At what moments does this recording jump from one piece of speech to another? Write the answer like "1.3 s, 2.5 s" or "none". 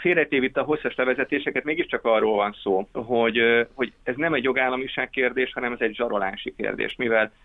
2.9 s